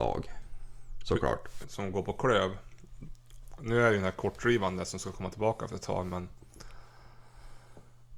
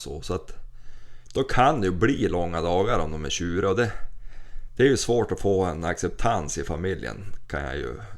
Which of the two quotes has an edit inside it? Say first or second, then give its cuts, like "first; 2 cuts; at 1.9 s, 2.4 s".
first; 1 cut; at 1.6 s